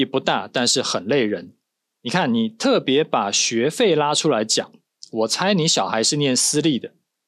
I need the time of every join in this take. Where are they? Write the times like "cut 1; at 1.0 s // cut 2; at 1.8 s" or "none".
cut 1; at 1.9 s